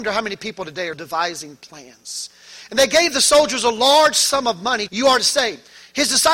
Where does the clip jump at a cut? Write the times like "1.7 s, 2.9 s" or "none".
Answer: 0.9 s, 4.9 s